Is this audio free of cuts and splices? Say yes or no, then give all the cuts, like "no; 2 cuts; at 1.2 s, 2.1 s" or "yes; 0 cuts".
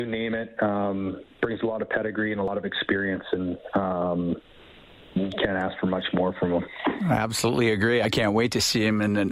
yes; 0 cuts